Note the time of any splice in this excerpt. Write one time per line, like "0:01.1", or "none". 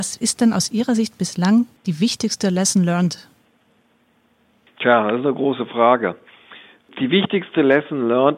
none